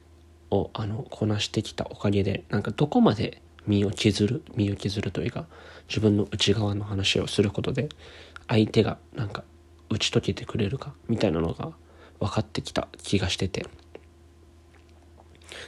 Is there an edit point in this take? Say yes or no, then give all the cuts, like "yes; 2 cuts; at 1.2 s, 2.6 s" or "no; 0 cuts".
no; 0 cuts